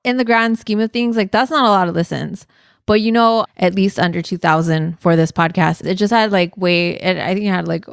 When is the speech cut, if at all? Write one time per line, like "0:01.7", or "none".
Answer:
0:03.5
0:05.8